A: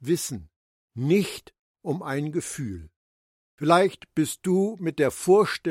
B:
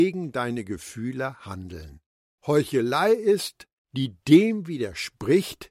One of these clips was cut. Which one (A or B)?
B